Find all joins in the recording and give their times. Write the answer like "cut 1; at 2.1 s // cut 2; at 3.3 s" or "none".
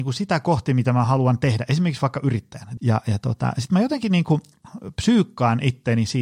cut 1; at 2.8 s